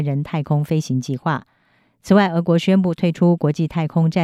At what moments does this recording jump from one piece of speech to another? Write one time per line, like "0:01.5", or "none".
none